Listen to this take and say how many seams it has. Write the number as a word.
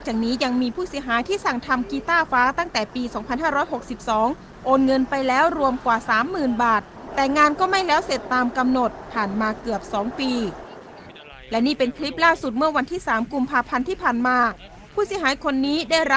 one